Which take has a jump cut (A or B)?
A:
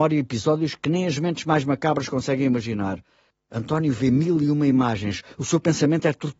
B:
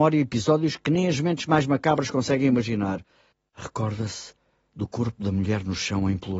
B